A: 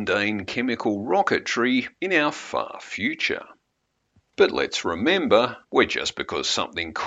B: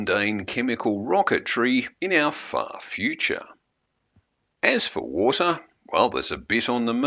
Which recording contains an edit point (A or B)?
A